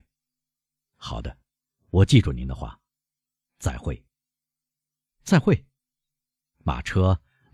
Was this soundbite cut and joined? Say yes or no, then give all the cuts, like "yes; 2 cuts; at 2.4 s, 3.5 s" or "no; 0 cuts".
no; 0 cuts